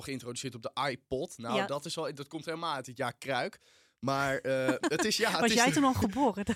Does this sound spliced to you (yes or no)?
no